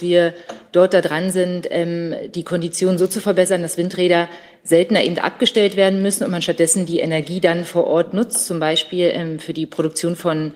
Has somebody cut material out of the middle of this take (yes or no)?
no